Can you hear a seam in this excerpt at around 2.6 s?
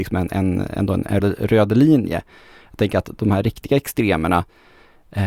no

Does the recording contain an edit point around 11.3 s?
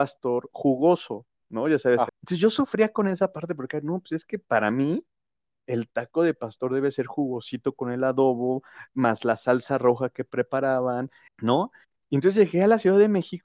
yes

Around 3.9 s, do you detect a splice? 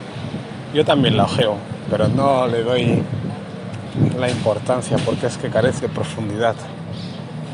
no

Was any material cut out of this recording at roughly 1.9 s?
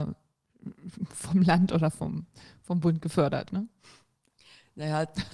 no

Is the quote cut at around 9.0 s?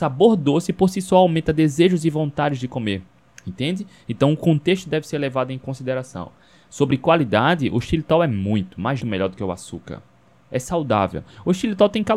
yes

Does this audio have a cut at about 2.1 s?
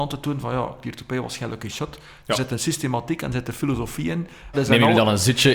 no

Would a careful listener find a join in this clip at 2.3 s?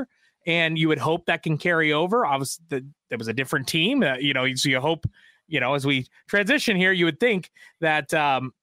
no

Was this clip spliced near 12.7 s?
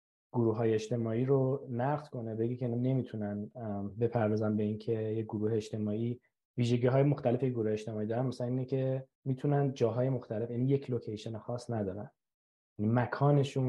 no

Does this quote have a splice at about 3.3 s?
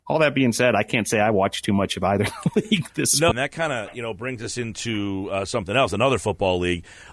yes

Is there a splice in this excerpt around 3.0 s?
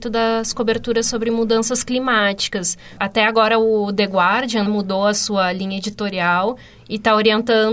yes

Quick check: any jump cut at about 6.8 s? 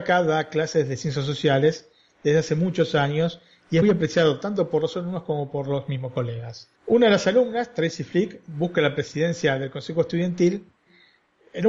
yes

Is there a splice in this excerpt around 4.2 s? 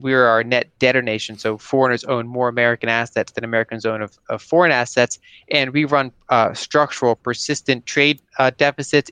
yes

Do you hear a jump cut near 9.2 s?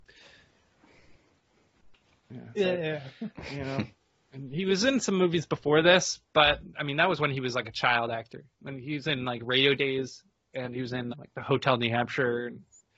no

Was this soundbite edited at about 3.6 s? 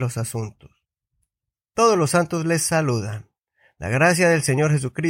no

